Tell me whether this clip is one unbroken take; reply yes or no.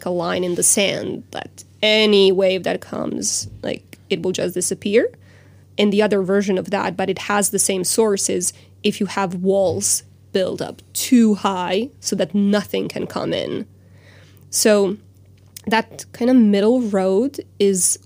yes